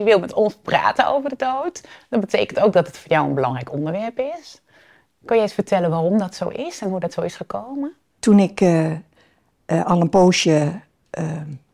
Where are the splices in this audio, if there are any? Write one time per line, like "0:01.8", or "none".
0:08.2

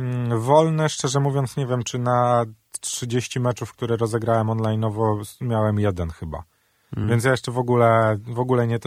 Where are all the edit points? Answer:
none

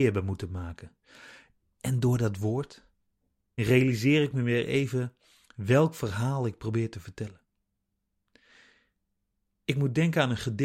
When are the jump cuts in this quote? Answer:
0:03.6

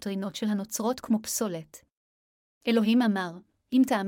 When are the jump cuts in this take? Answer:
0:02.6

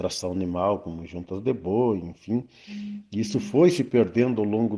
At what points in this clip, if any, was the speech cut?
none

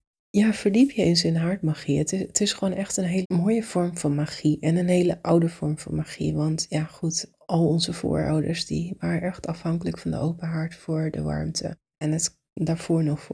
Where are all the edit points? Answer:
0:03.2

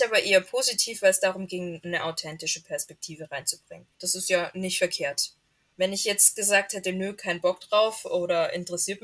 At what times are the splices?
0:03.9

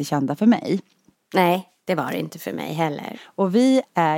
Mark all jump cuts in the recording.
0:03.1

